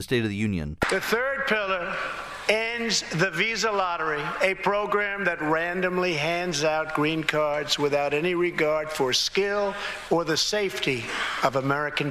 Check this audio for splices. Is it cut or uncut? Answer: cut